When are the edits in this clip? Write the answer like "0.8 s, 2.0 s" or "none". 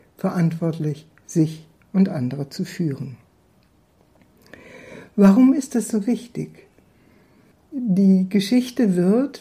none